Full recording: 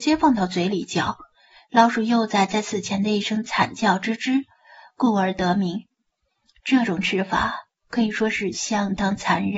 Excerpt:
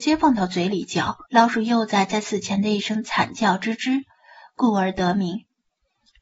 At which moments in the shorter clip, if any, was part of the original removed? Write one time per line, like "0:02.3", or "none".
0:01.3